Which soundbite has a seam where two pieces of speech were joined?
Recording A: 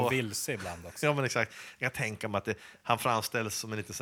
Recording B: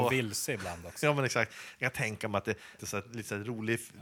B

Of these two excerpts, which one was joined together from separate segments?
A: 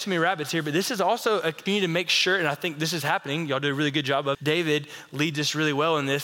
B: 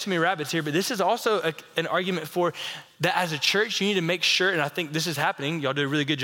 A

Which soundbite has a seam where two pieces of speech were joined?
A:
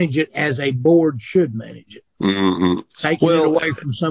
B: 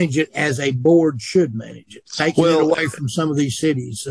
B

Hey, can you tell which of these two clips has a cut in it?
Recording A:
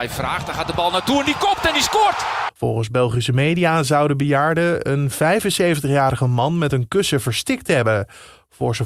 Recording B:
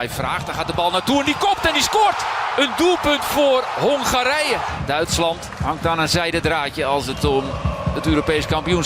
A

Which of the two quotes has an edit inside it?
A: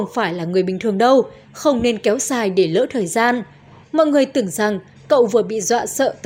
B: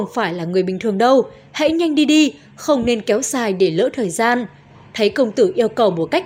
A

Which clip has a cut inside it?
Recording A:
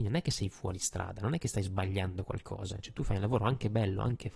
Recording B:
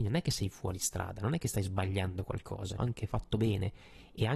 B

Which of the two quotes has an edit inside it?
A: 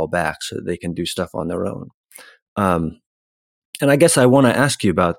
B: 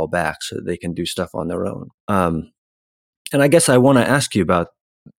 B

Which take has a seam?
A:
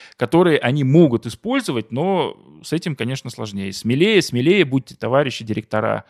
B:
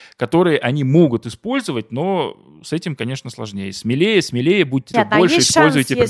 B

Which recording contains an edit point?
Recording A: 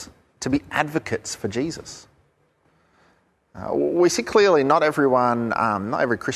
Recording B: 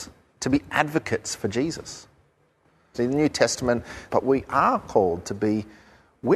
B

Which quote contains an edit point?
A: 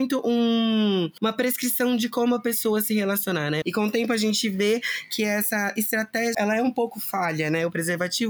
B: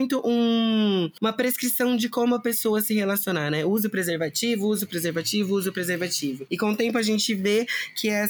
A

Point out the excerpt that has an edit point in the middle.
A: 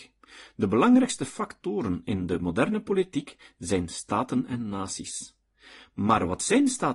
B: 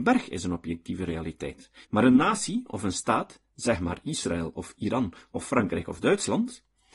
B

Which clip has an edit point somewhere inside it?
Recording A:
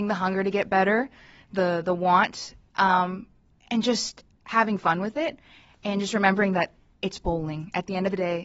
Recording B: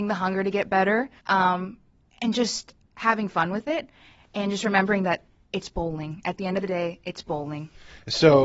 B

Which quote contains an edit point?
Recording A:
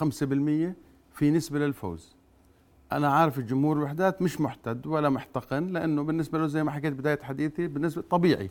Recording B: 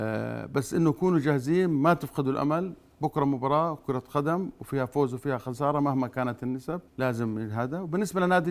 B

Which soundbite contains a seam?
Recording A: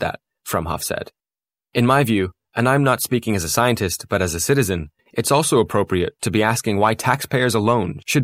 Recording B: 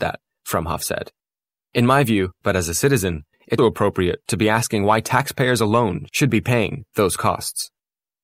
B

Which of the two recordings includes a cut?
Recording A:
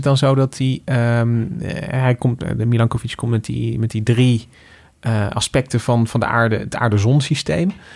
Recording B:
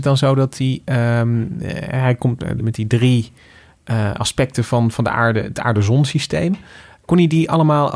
B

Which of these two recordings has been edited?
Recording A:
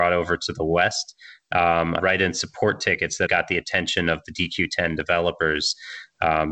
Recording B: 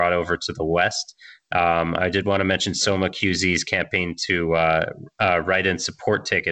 A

